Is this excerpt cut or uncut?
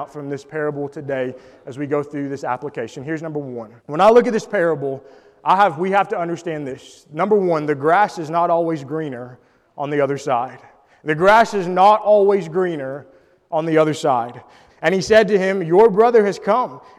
cut